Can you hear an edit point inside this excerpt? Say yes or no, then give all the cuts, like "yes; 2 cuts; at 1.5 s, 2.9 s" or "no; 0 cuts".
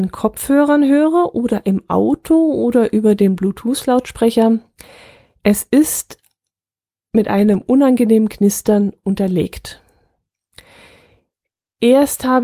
no; 0 cuts